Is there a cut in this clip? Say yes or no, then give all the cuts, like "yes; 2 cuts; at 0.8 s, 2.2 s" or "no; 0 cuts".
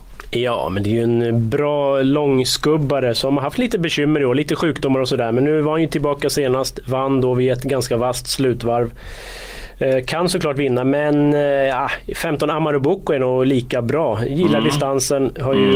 no; 0 cuts